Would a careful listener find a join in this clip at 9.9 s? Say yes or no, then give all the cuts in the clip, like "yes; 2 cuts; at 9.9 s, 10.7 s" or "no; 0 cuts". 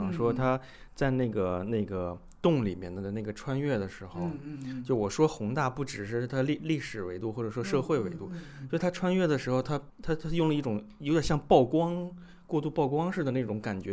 yes; 1 cut; at 9.9 s